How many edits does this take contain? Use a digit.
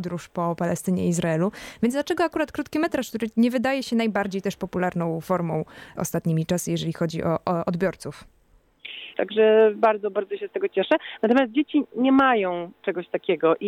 2